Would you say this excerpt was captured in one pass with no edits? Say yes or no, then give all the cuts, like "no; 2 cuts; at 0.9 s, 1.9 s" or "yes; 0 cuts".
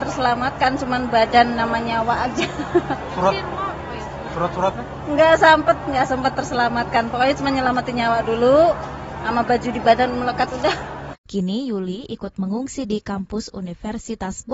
no; 1 cut; at 11.2 s